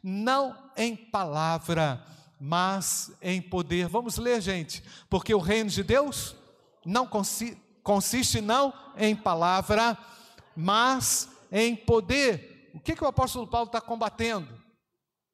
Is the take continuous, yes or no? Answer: yes